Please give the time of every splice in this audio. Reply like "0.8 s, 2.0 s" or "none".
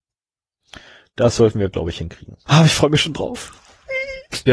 2.5 s